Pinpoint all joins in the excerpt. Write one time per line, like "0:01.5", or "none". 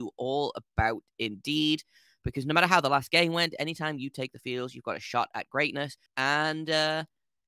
0:06.1